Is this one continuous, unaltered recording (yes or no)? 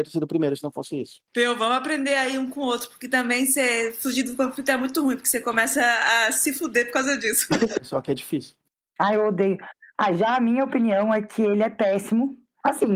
no